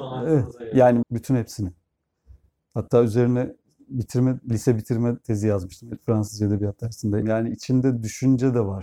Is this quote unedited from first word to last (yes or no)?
no